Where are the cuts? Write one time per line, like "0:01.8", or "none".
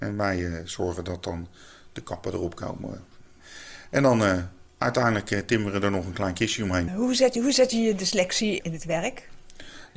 0:06.9
0:08.6